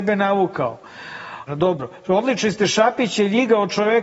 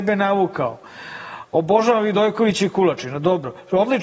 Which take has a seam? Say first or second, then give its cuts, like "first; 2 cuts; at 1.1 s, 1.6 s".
first; 1 cut; at 1.5 s